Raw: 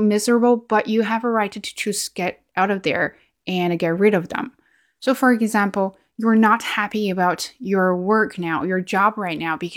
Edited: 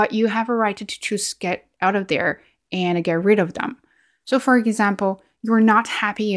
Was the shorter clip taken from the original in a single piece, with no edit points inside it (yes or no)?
yes